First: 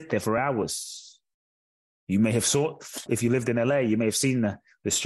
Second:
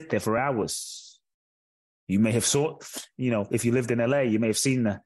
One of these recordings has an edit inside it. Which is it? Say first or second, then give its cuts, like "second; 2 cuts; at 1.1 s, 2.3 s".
first; 1 cut; at 3.1 s